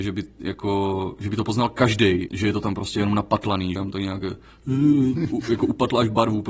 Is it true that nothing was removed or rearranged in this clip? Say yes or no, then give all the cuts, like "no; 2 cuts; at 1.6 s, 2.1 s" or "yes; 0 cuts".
no; 2 cuts; at 2.3 s, 3.8 s